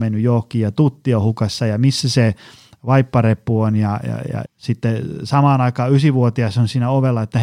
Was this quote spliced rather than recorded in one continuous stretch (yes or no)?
yes